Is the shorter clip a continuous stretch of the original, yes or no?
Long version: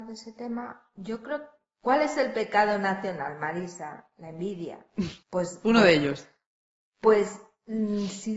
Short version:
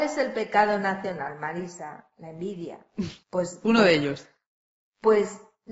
yes